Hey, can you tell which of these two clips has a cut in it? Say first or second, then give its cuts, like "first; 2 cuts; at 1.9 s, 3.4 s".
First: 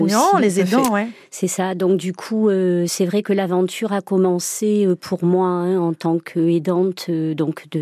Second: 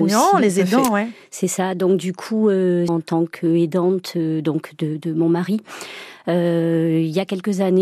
second; 1 cut; at 2.9 s